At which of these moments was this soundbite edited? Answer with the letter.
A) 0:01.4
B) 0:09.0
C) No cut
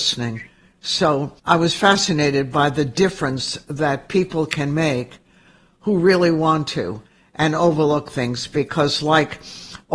A